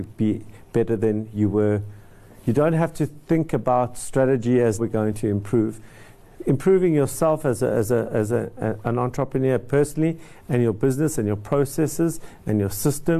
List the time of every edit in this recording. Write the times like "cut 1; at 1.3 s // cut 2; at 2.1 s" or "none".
cut 1; at 4.8 s